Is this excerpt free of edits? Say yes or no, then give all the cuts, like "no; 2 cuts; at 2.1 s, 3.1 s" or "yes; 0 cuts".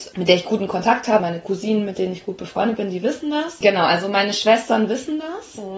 no; 2 cuts; at 1.2 s, 3.6 s